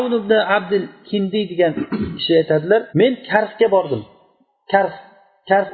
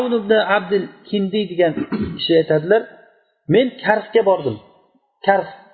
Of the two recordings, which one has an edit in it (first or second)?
first